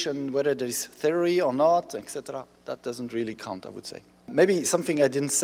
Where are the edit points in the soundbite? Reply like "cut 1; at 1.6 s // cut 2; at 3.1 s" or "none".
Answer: none

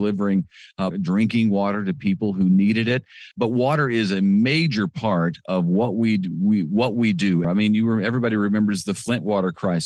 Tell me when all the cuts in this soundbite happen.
cut 1; at 0.9 s // cut 2; at 3.3 s // cut 3; at 7.4 s

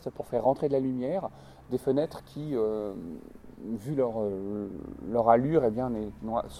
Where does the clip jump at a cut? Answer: none

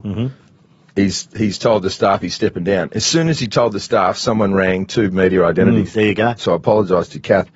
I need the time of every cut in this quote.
cut 1; at 6.4 s

